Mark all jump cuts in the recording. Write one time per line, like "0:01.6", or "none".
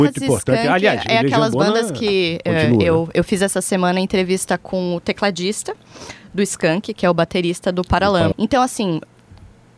0:06.9
0:08.3